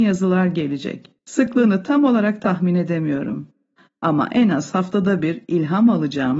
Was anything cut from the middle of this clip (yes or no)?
yes